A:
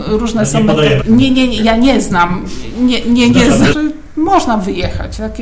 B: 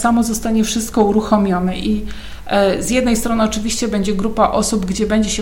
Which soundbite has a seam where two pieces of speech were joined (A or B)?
A